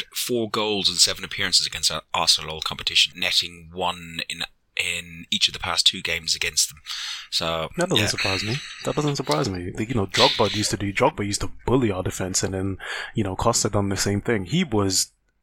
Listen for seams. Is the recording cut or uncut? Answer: cut